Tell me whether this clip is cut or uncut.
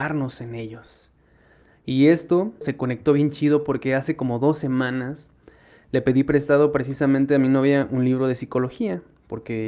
cut